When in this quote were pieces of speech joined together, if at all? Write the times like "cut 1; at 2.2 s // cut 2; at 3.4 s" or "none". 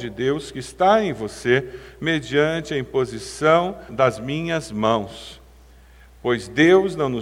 cut 1; at 3.9 s